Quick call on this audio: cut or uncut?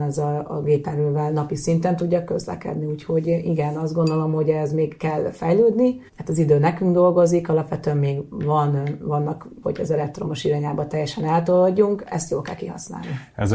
cut